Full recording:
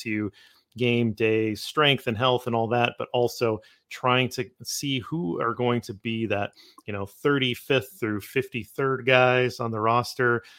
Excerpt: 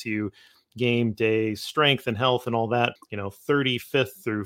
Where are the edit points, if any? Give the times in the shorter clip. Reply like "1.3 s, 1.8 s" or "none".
3.0 s